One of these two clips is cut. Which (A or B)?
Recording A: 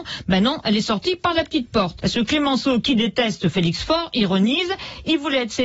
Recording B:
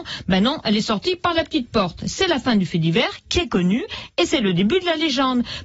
A